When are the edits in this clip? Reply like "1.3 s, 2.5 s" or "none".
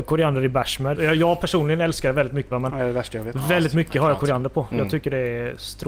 0.9 s, 2.5 s